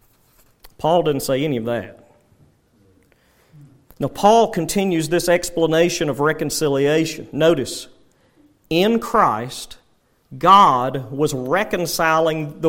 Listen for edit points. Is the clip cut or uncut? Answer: uncut